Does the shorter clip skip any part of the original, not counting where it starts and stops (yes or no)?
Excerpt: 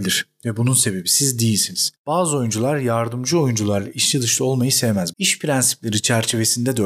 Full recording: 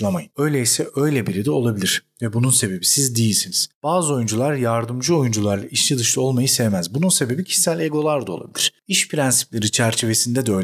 yes